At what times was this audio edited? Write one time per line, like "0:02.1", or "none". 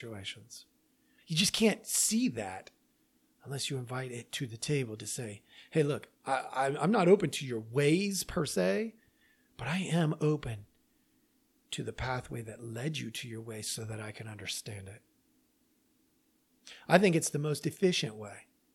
none